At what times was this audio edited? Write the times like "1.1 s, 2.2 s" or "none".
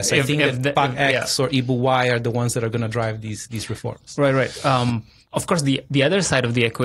none